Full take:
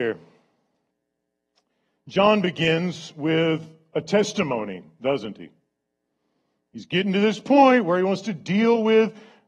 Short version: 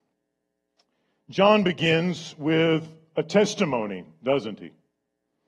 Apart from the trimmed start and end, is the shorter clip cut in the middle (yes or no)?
no